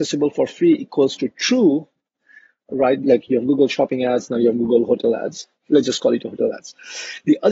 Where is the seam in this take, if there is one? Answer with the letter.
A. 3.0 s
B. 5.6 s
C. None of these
A